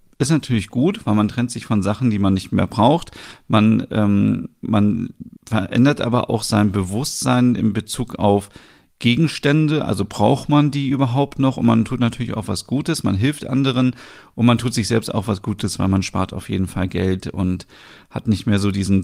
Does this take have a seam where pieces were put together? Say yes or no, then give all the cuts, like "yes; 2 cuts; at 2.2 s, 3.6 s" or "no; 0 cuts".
yes; 1 cut; at 5.4 s